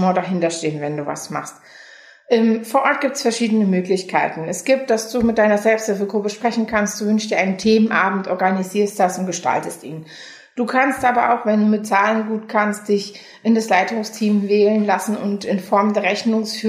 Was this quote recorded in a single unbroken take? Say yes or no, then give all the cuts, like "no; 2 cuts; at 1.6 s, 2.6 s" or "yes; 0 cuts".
yes; 0 cuts